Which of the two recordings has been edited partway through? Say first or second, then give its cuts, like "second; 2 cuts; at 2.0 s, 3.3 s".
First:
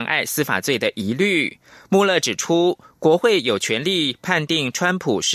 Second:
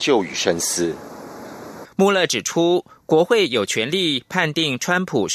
second; 1 cut; at 1.8 s